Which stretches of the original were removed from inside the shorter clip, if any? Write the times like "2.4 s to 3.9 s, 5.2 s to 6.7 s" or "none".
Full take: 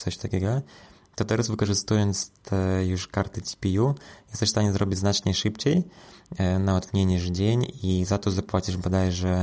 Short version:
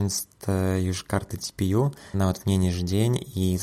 4.2 s to 6.6 s